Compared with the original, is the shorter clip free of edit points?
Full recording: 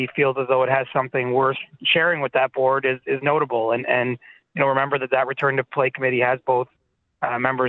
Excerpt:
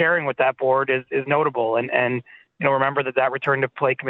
yes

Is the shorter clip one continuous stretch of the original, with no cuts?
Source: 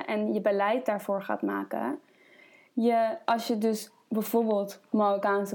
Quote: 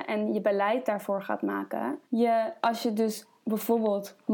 no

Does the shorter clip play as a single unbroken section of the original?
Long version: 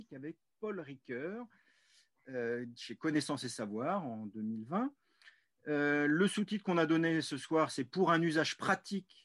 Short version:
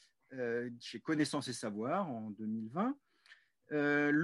yes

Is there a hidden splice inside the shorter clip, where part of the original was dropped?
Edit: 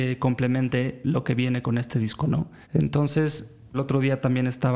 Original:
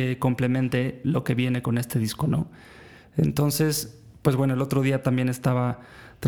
yes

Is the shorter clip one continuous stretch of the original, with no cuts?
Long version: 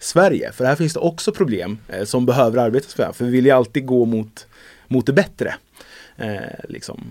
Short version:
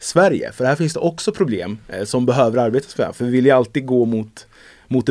yes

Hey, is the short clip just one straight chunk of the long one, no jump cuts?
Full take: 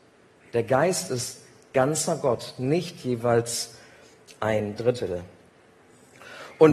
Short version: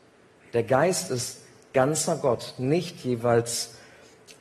yes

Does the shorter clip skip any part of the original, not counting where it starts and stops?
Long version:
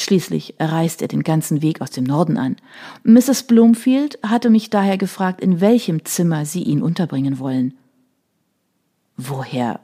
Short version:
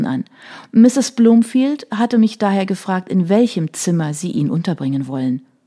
no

